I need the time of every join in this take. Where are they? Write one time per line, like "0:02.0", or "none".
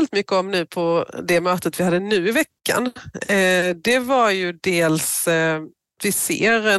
none